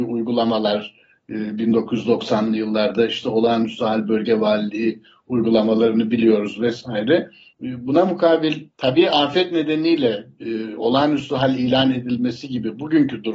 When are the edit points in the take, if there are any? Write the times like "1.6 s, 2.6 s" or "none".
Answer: 7.5 s, 8.7 s, 10.3 s